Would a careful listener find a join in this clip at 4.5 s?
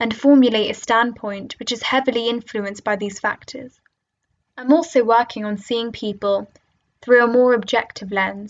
yes; 1 cut; at 4.5 s

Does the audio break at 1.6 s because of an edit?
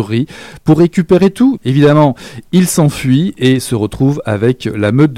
yes; 1 cut; at 1.6 s

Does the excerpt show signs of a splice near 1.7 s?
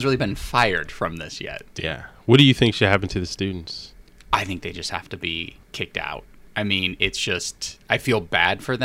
yes; 1 cut; at 1.7 s

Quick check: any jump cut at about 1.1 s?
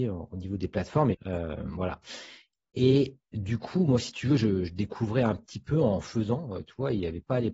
yes; 1 cut; at 1.1 s

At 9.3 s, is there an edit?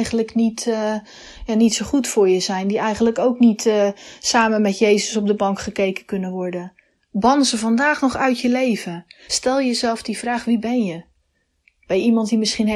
yes; 1 cut; at 9.3 s

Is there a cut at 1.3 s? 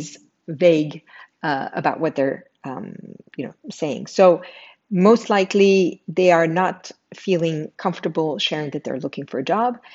no; 0 cuts

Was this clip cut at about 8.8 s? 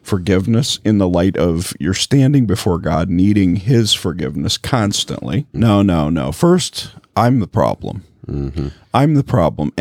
no; 1 cut; at 5.5 s

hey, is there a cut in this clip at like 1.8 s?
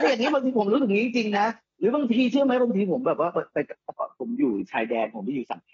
no; 0 cuts

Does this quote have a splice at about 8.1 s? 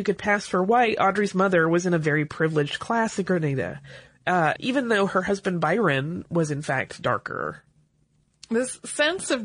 no; 1 cut; at 4.6 s

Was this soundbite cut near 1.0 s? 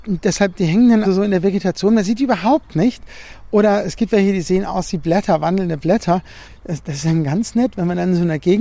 yes; 1 cut; at 1.0 s

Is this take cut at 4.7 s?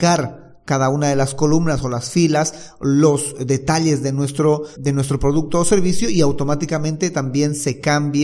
yes; 1 cut; at 4.7 s

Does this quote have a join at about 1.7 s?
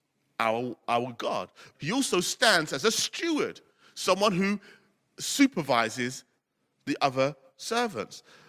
yes; 1 cut; at 1.7 s

